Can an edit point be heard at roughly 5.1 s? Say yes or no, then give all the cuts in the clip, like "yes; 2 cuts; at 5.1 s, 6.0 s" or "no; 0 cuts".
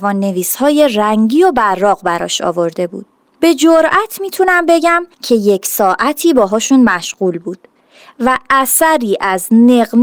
yes; 2 cuts; at 3.4 s, 5.1 s